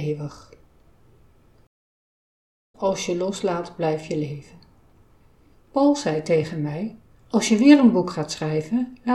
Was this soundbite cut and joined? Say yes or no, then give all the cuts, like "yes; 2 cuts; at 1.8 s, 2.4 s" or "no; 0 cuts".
yes; 2 cuts; at 2.7 s, 5.5 s